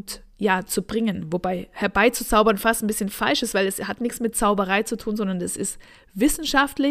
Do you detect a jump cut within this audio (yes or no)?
no